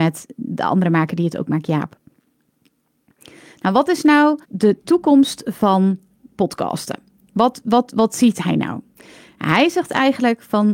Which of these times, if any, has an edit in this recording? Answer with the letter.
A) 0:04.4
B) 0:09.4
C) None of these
A